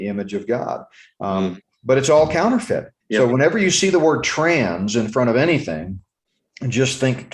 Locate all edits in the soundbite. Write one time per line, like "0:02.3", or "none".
0:03.0